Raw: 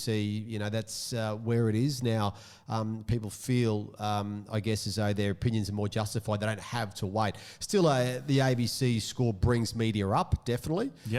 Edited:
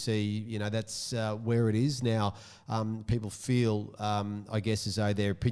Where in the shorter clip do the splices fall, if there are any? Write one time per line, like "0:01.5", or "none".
none